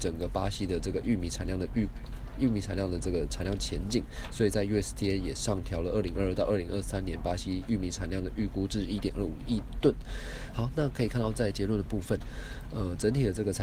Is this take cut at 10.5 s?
yes; 1 cut; at 10.5 s

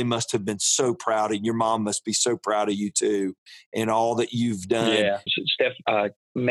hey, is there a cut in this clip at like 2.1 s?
no; 1 cut; at 5.3 s

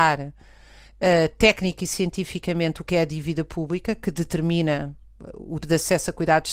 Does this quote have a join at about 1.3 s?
no; 1 cut; at 5.6 s

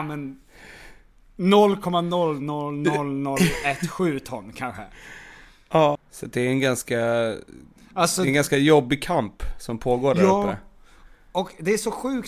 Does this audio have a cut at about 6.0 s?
yes; 1 cut; at 6.0 s

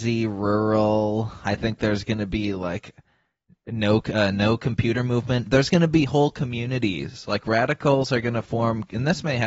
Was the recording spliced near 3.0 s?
no; 0 cuts

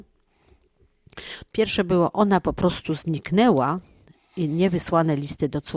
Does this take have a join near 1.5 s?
yes; 1 cut; at 1.5 s

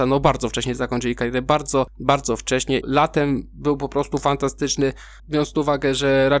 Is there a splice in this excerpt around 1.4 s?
no; 2 cuts; at 2.8 s, 5.2 s

